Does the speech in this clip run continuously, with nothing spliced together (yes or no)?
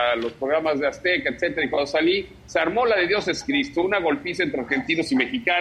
yes